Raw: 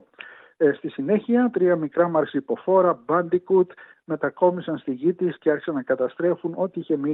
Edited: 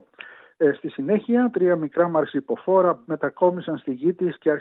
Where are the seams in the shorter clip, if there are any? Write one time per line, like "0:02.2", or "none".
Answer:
0:03.0